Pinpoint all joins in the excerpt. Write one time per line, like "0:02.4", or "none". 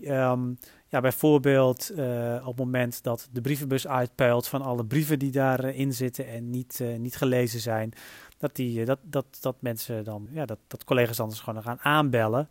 0:10.3